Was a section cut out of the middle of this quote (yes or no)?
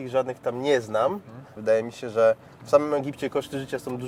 yes